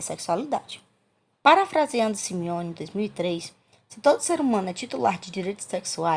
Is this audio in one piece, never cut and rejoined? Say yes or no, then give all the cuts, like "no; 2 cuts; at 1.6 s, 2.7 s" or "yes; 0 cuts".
no; 1 cut; at 1.3 s